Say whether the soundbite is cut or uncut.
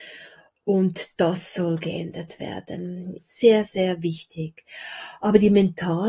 cut